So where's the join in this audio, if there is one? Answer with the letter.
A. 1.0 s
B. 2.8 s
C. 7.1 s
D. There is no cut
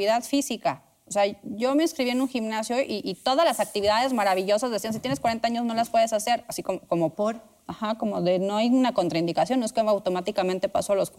C